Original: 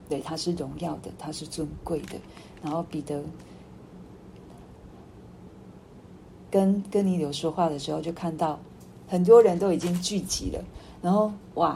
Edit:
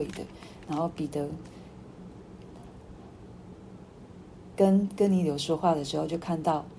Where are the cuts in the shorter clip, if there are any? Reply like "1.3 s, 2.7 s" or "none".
none

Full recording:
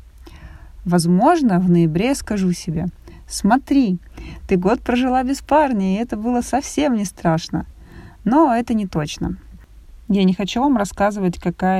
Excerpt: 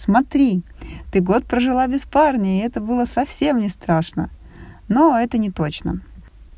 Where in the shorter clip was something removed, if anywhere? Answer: none

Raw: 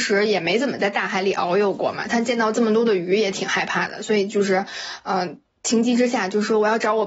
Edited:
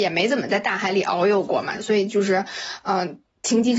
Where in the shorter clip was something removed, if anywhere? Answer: 1.8 s

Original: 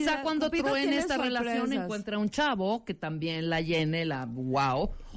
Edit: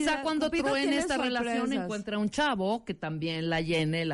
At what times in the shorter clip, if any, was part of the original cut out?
none

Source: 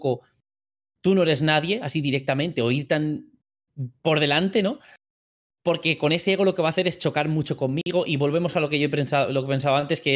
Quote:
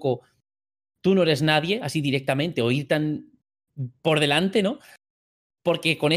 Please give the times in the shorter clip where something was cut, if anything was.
none

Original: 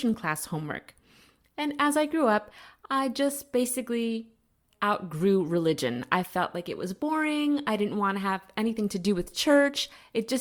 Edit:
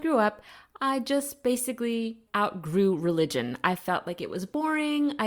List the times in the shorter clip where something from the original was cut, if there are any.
2.3 s

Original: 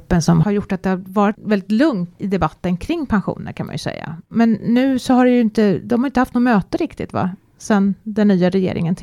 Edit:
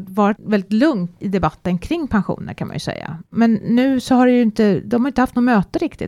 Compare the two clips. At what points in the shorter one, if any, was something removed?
none

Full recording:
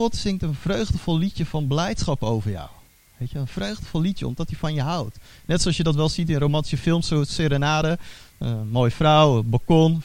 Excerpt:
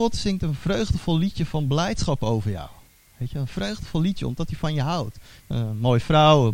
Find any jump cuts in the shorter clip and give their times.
5.4 s

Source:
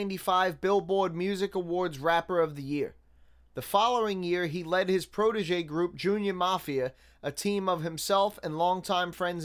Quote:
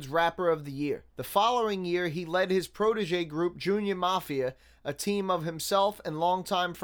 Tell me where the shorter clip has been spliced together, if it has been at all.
1.1 s

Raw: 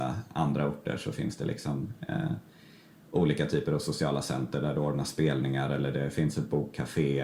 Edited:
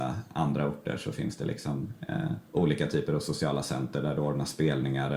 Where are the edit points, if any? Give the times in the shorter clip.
2.4 s

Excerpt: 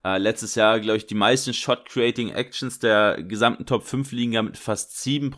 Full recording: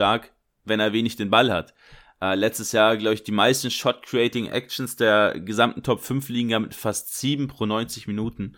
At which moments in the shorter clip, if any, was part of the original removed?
none

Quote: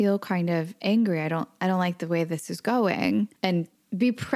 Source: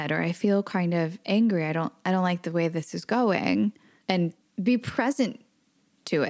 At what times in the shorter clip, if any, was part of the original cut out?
3.4 s

